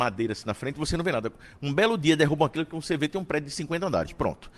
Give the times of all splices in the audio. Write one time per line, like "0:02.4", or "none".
none